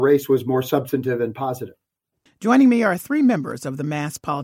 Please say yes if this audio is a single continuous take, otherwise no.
no